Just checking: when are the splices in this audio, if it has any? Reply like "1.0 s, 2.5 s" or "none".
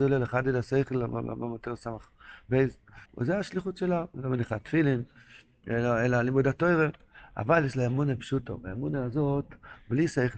3.0 s